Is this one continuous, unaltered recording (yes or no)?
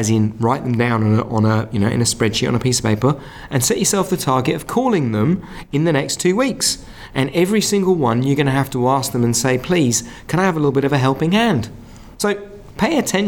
no